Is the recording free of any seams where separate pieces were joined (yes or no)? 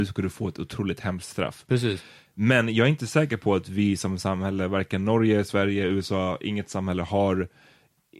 yes